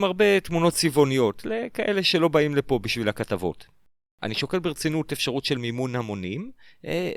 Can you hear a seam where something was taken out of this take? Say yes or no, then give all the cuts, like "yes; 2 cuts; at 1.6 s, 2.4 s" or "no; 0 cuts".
no; 0 cuts